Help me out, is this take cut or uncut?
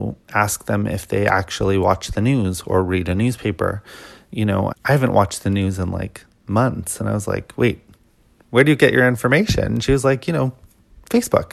cut